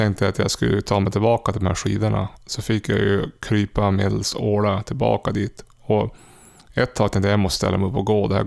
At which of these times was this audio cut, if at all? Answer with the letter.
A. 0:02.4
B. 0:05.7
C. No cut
C